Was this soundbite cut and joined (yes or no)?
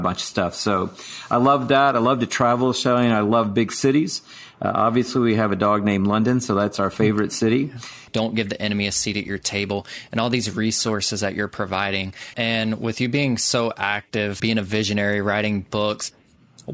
yes